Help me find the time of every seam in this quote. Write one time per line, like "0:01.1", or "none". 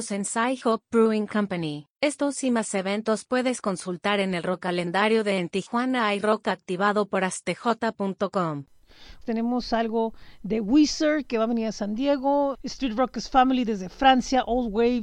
0:01.9
0:09.2
0:12.5